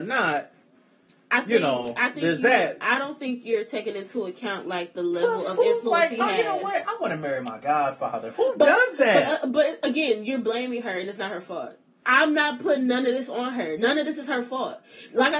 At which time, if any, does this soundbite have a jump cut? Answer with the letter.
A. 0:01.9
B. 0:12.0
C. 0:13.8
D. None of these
D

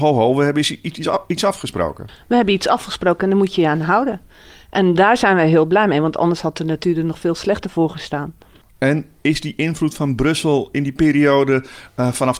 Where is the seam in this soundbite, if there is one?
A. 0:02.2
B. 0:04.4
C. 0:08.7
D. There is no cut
D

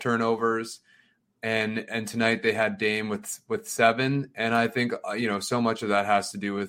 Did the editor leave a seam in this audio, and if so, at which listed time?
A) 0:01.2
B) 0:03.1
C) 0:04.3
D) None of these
A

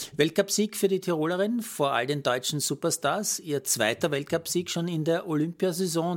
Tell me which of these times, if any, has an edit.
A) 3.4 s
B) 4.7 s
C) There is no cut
C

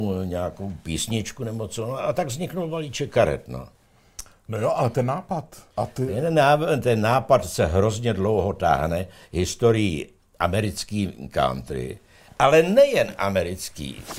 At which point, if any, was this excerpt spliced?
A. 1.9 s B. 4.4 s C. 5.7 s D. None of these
C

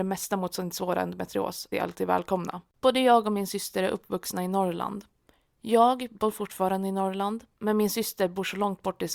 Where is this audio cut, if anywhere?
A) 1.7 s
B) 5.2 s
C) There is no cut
A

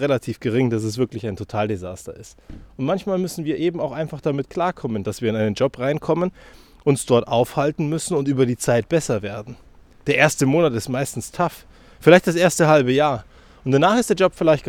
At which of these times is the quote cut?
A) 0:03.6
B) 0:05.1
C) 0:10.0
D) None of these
D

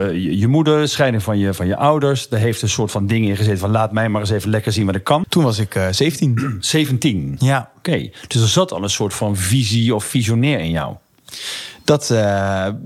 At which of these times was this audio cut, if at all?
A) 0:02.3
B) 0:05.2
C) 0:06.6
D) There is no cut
B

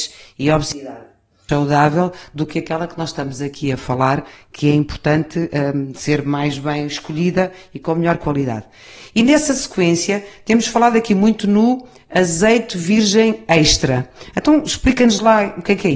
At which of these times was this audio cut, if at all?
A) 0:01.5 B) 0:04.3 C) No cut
A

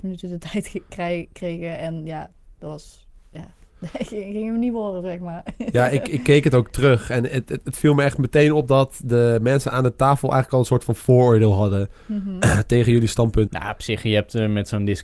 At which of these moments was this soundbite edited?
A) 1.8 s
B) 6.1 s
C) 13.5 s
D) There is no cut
C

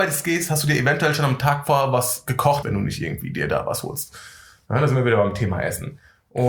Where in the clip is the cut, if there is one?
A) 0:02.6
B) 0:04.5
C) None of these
A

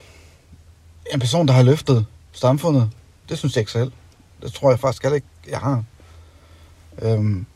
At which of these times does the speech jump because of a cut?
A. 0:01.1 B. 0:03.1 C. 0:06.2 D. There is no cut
D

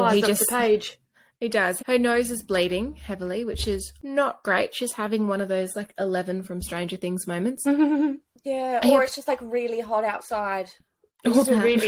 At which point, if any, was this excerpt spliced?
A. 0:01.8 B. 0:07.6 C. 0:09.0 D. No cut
A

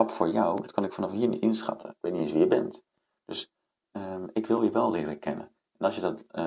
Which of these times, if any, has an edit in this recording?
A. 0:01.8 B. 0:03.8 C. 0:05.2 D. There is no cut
D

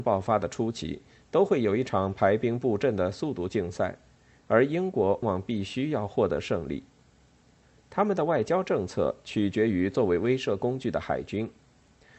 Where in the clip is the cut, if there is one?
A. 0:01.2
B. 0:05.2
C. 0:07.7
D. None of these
B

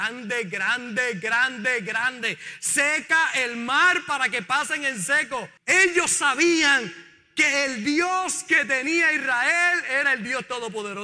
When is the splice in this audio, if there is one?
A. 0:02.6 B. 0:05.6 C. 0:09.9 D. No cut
B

